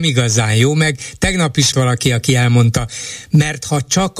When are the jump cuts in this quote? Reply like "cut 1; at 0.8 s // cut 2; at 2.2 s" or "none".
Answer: cut 1; at 1.7 s